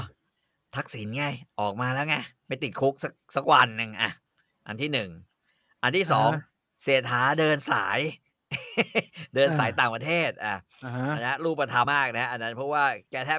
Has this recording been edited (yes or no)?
yes